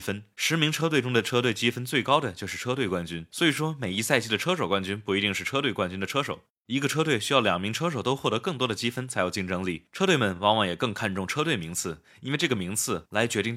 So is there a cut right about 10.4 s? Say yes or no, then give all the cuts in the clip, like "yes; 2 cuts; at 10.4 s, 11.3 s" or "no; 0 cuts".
no; 0 cuts